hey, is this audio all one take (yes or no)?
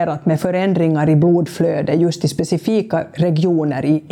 yes